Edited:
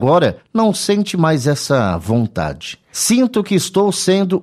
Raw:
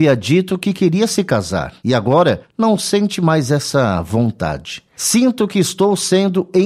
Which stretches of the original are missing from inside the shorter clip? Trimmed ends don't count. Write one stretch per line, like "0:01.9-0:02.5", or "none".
none